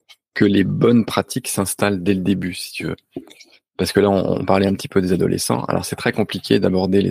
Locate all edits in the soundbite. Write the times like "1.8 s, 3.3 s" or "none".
none